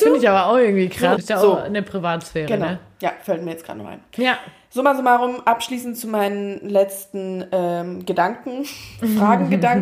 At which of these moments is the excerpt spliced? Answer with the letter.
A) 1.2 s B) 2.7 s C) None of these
A